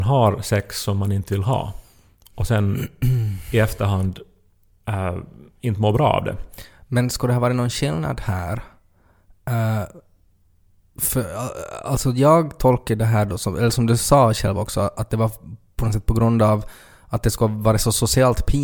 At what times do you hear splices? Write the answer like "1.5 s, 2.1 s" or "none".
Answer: none

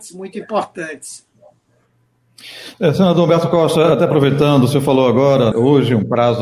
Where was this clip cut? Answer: 5.5 s

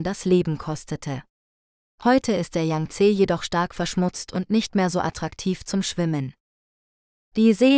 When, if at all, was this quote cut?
none

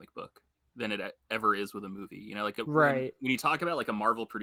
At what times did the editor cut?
none

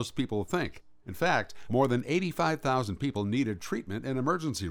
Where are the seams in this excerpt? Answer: 1.7 s

